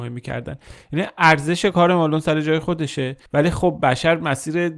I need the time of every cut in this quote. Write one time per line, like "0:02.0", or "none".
0:03.3